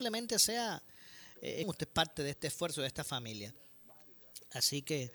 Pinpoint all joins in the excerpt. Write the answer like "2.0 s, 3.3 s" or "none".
1.6 s

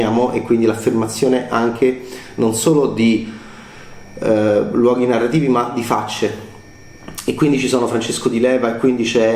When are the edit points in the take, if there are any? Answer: none

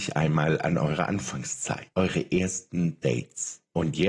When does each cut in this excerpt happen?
1.9 s

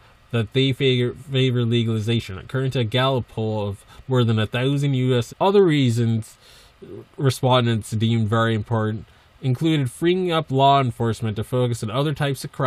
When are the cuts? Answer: 5.3 s

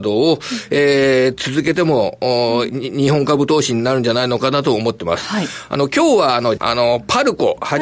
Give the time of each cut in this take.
2.7 s, 6.6 s

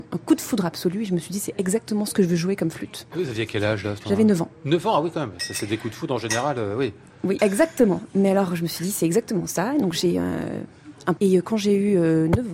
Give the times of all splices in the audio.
7.4 s, 11.2 s

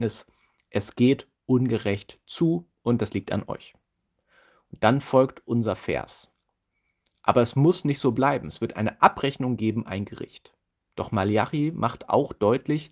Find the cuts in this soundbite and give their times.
none

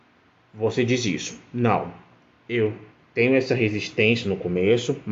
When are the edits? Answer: none

